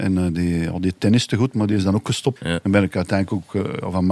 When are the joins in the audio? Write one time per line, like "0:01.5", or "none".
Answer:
0:02.4